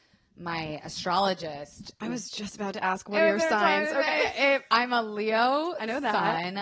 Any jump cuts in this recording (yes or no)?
no